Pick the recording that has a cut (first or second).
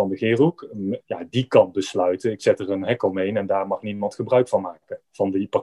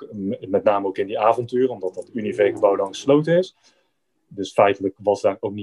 first